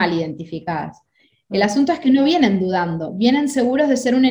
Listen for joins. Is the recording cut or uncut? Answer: uncut